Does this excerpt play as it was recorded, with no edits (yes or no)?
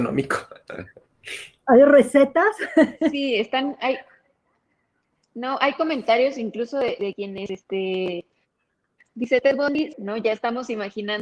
no